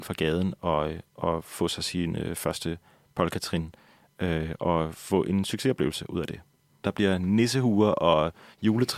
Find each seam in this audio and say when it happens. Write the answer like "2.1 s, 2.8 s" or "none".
6.8 s